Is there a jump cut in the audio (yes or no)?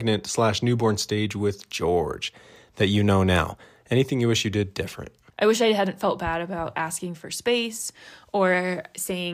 yes